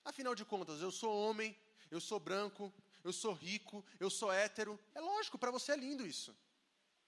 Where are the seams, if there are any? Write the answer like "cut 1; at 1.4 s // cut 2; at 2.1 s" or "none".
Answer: cut 1; at 4.9 s